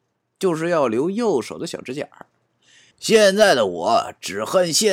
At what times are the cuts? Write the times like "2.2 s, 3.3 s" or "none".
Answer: 2.9 s